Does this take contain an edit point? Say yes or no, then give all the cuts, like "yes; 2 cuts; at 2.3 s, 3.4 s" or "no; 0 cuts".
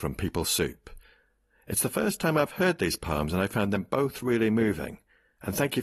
no; 0 cuts